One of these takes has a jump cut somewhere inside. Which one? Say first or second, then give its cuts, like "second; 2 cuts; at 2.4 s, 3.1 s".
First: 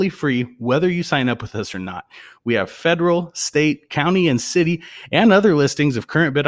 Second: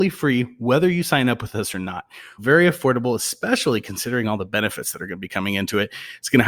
second; 1 cut; at 2.4 s